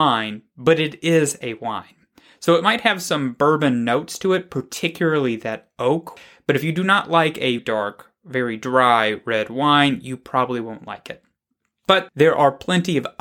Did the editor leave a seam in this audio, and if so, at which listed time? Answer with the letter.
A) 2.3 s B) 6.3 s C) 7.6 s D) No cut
C